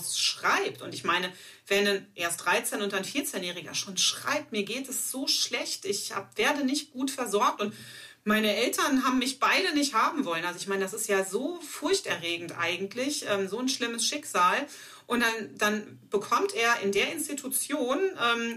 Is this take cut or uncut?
uncut